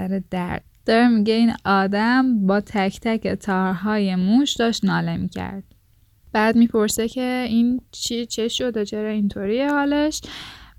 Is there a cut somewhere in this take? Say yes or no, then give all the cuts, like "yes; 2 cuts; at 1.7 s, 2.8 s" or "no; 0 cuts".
no; 0 cuts